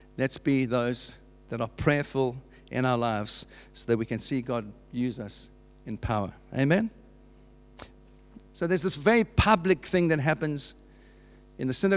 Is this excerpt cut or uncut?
uncut